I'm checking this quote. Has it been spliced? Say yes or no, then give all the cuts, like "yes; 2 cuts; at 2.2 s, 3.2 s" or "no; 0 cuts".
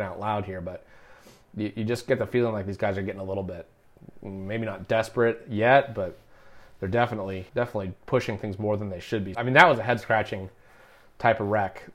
yes; 2 cuts; at 7.5 s, 9.3 s